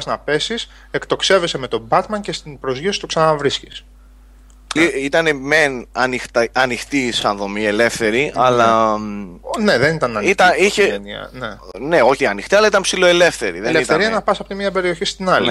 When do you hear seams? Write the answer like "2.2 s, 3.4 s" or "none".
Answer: 4.8 s, 12.2 s